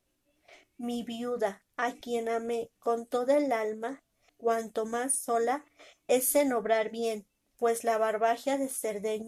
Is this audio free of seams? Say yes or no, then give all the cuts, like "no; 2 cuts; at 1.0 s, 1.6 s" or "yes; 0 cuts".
no; 1 cut; at 4.3 s